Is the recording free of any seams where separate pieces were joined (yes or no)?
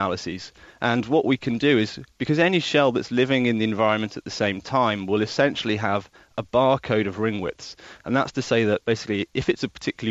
yes